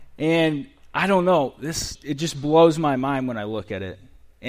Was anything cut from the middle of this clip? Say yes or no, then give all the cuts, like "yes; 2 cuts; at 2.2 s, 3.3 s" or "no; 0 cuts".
yes; 1 cut; at 1.9 s